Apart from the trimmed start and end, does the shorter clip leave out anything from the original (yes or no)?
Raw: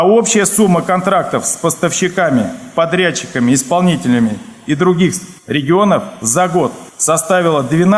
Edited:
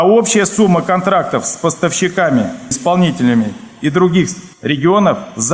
yes